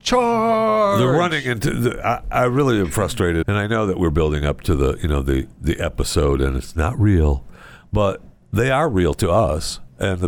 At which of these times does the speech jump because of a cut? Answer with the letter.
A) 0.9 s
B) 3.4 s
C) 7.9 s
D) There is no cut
B